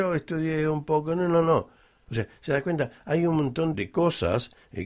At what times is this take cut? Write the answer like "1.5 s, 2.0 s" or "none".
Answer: 2.1 s, 3.7 s